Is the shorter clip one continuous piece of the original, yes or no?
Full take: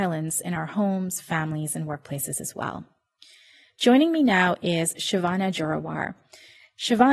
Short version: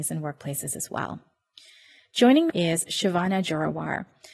no